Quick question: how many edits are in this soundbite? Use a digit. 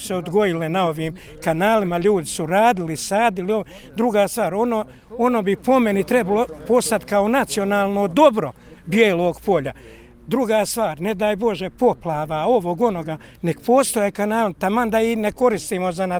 0